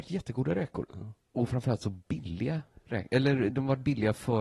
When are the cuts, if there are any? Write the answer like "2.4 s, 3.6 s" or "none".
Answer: none